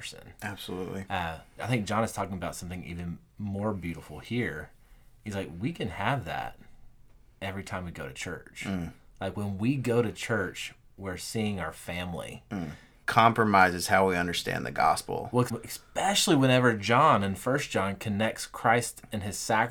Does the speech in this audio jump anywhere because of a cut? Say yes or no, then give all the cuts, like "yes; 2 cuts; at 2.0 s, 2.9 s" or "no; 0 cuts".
yes; 3 cuts; at 1.6 s, 13.0 s, 15.5 s